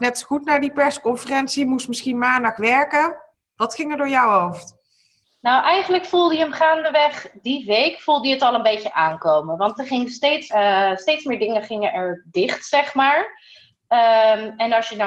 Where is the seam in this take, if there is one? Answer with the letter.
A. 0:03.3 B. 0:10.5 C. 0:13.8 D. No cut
B